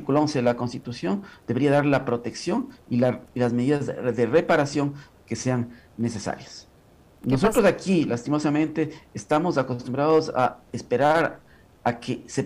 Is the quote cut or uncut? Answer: uncut